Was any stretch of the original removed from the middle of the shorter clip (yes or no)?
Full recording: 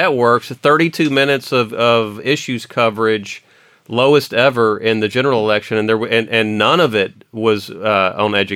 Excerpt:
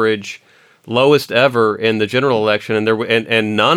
no